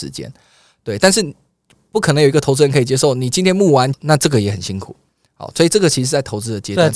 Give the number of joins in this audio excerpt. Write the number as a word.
one